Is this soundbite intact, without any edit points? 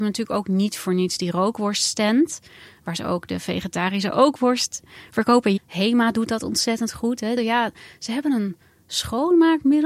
no; 2 cuts; at 5.6 s, 7.4 s

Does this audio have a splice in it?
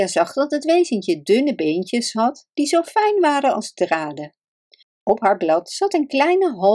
yes; 1 cut; at 4.8 s

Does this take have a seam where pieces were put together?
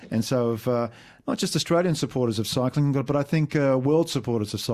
no; 0 cuts

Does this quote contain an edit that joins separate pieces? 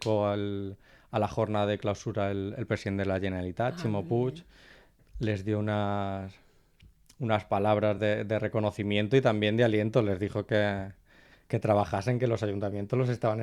no; 0 cuts

